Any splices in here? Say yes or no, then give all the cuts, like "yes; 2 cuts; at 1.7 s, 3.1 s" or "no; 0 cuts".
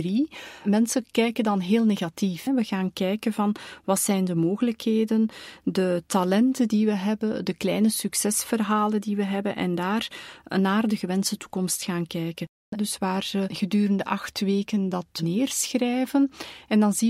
yes; 2 cuts; at 2.5 s, 12.7 s